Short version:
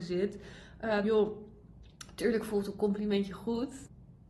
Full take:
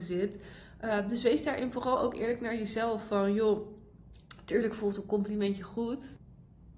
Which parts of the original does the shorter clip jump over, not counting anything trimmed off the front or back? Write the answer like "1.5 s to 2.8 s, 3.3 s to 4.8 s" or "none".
1.0 s to 3.3 s